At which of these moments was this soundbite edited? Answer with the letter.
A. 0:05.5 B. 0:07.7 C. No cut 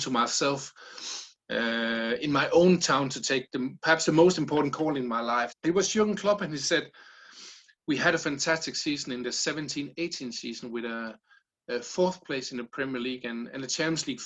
A